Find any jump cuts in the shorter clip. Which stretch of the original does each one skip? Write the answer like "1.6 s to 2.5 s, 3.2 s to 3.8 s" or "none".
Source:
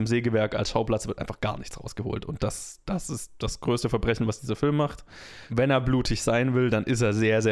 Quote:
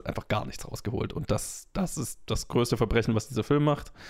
none